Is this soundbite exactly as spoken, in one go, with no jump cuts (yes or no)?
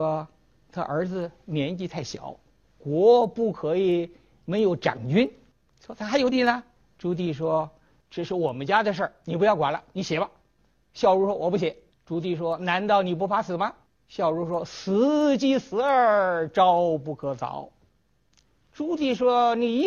no